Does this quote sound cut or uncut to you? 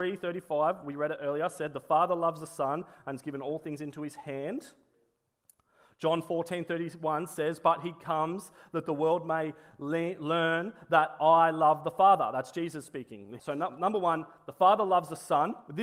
cut